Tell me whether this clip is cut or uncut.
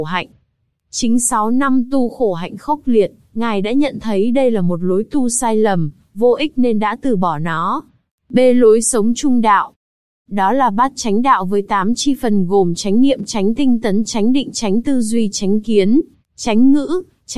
uncut